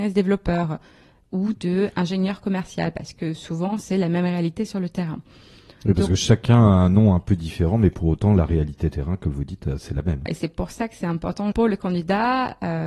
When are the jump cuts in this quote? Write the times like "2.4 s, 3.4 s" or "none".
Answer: 10.3 s, 11.5 s